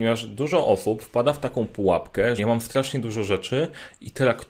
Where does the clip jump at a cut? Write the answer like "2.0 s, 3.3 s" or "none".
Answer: 2.4 s